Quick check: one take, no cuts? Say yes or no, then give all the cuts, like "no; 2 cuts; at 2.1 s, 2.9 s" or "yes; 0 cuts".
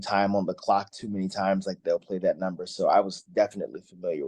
yes; 0 cuts